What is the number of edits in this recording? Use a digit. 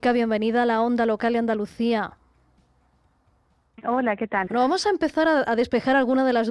1